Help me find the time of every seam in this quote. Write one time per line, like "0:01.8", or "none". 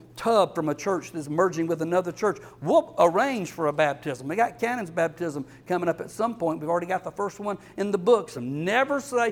0:08.3